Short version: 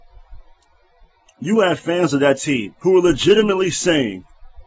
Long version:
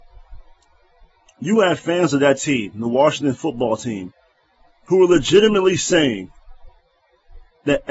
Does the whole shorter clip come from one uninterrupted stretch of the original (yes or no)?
no